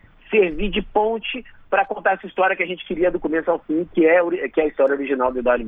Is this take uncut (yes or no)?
yes